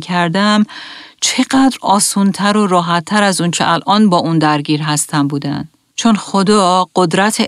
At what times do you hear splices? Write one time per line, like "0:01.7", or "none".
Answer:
0:05.9